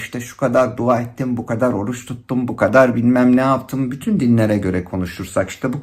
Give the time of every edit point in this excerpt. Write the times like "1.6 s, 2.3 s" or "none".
2.5 s